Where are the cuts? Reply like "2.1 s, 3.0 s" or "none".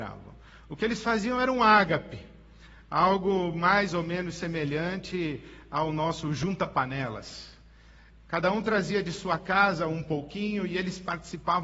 none